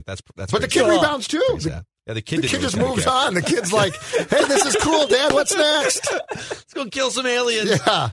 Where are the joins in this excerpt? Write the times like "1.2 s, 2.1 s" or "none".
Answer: none